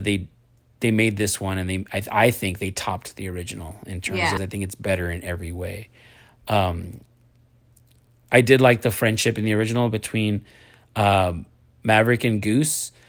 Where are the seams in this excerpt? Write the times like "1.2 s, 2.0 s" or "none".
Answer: 4.4 s